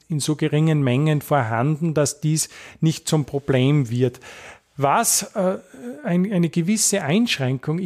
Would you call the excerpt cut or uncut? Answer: uncut